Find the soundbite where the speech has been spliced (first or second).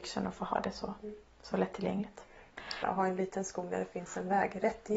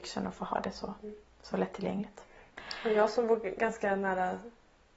first